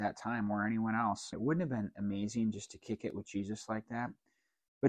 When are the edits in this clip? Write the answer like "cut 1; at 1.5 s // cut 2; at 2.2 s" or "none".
cut 1; at 1.3 s